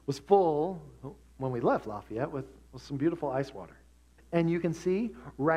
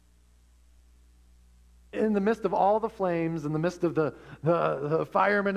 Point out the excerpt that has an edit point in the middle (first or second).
first